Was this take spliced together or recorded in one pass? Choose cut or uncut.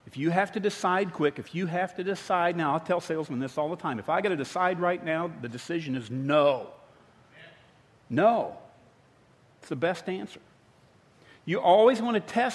uncut